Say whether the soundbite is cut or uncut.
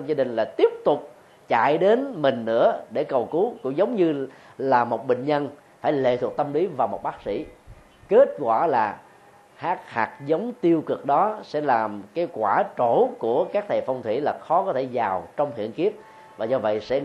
uncut